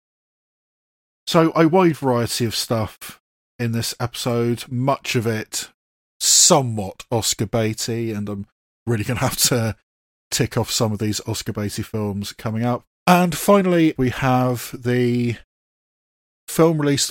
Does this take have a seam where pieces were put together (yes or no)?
yes